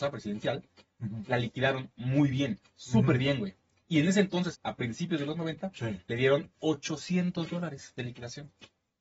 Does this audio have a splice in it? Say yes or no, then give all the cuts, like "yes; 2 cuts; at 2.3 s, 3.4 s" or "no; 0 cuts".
yes; 1 cut; at 4.5 s